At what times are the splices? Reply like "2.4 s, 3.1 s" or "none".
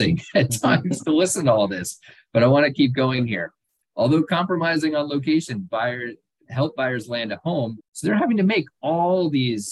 6.5 s, 7.8 s